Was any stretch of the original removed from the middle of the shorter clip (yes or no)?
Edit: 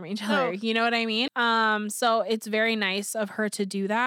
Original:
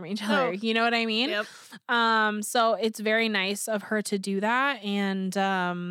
yes